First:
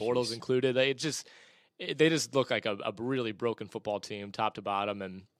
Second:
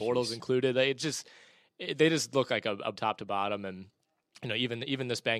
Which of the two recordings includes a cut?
second; 1 cut; at 3.0 s

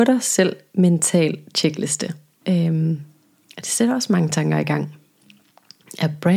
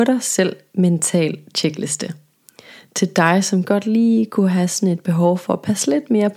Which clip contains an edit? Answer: first; 1 cut; at 2.4 s

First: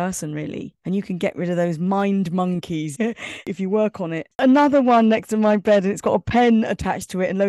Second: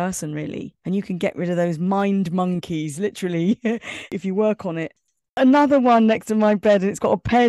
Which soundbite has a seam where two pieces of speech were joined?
first; 2 cuts; at 2.9 s, 4.3 s

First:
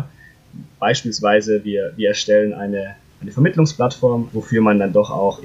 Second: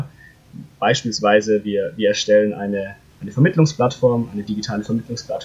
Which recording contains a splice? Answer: first; 1 cut; at 4.3 s

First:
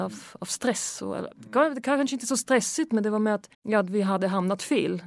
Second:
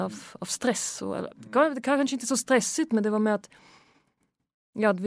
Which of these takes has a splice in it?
first; 1 cut; at 3.5 s

